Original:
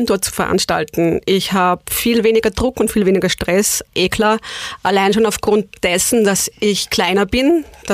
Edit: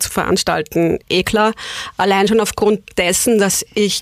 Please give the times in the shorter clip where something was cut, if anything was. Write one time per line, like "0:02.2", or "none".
0:01.0